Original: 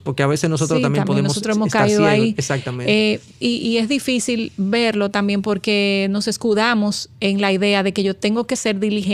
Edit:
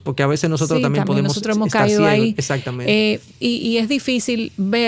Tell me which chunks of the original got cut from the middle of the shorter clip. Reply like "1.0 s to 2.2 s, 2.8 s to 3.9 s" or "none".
none